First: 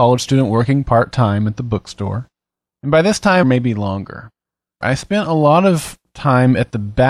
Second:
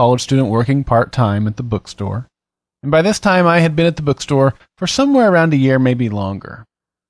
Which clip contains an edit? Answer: first; 2 cuts; at 3.4 s, 4.8 s

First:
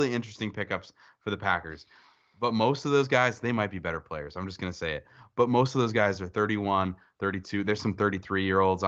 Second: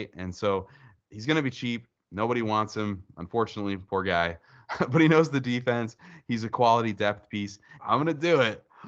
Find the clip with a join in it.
second; 1 cut; at 7.8 s

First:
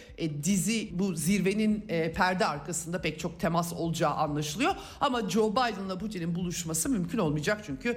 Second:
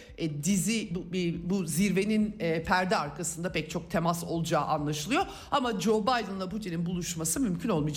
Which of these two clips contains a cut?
first; 1 cut; at 0.9 s

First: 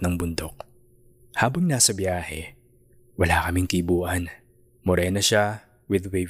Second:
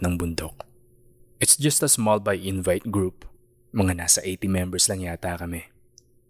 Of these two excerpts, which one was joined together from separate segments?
first; 2 cuts; at 1.2 s, 4.7 s

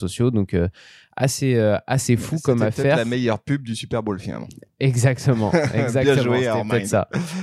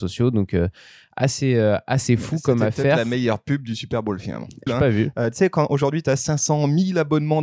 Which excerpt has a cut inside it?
second; 1 cut; at 4.7 s

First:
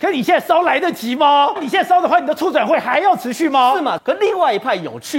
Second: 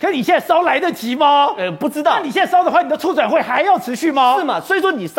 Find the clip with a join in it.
first; 2 cuts; at 1.6 s, 4.0 s

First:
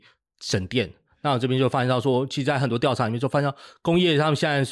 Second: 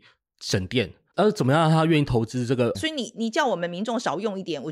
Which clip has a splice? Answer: second; 2 cuts; at 1.1 s, 2.7 s

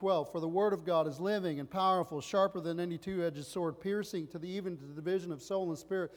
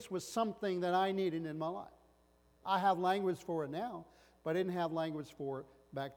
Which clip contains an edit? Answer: second; 1 cut; at 2.6 s

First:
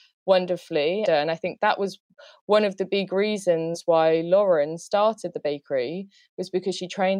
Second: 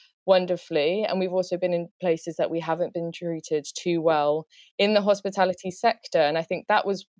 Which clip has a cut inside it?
first; 1 cut; at 1.1 s

